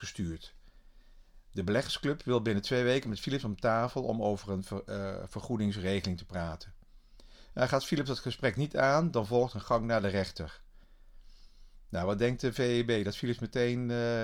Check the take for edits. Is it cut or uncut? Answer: uncut